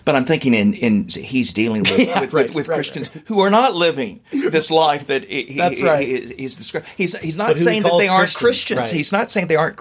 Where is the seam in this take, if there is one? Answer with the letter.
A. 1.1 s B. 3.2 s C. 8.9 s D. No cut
A